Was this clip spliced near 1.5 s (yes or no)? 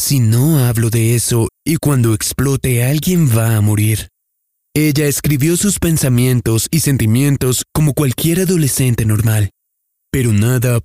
yes